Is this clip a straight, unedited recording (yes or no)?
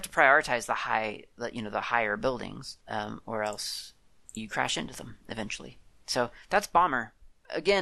yes